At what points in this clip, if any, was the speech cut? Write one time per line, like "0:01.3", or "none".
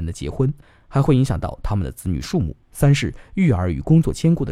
0:02.6